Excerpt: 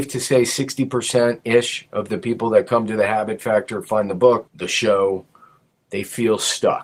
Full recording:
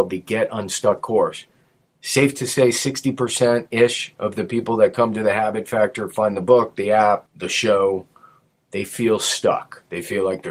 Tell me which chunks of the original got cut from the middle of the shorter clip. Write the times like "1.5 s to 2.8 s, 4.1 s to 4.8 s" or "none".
6.7 s to 7.3 s